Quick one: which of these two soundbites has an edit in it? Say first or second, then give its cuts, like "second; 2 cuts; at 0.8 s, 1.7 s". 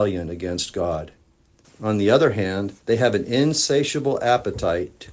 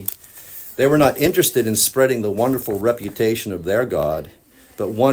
first; 2 cuts; at 1.6 s, 2.8 s